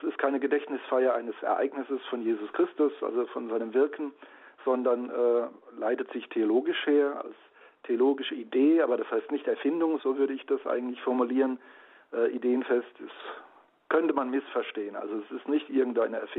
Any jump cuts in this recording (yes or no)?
yes